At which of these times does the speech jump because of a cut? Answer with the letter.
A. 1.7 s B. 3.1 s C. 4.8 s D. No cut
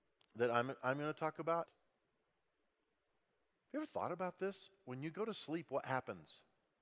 A